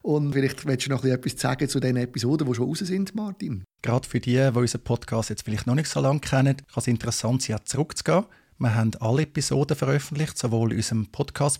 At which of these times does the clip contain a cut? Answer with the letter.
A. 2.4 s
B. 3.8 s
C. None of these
B